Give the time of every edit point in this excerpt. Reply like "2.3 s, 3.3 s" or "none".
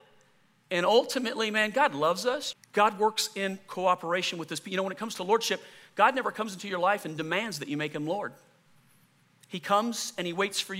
2.5 s